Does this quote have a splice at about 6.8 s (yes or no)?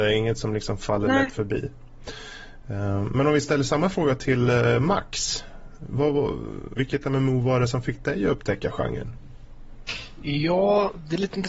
yes